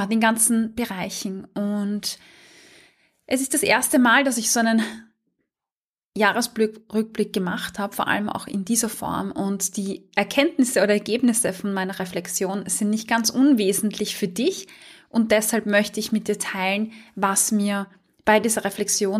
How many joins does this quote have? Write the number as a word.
zero